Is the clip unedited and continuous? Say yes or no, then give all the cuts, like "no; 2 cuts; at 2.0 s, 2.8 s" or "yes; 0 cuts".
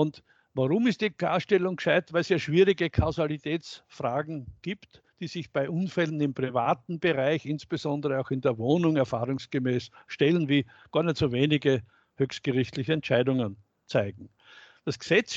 yes; 0 cuts